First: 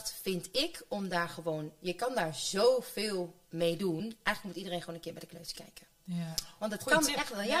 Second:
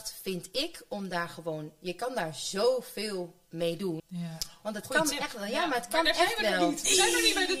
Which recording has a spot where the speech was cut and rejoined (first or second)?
second